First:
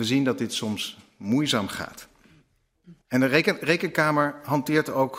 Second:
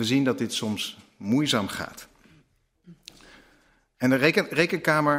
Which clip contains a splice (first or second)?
first